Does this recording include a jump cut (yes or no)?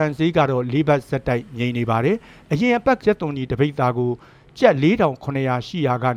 yes